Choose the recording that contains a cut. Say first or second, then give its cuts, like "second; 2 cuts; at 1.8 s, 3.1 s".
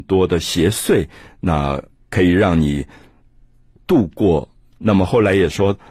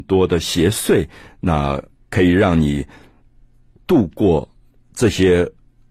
first; 1 cut; at 4.7 s